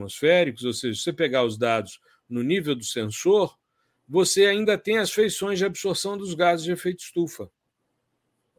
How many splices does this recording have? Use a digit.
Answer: 0